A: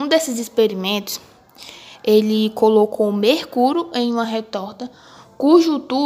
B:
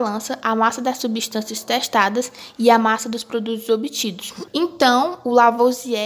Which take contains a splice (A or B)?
B